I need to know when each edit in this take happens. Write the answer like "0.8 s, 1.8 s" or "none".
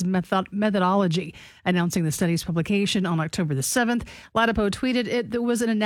none